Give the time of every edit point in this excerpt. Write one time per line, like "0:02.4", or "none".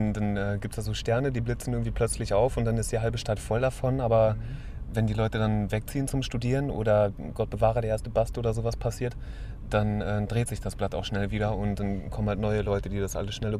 none